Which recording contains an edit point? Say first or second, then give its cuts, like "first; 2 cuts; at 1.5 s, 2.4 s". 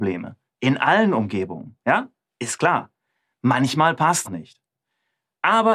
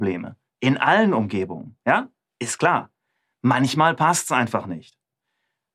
first; 1 cut; at 4.2 s